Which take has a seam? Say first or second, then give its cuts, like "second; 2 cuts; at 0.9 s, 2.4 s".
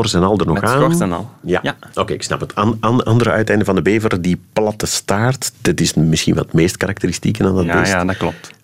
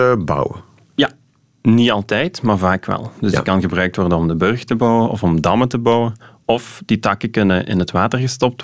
first; 1 cut; at 5.5 s